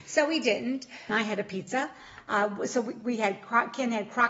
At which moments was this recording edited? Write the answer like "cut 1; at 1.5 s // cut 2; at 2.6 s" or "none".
cut 1; at 1.1 s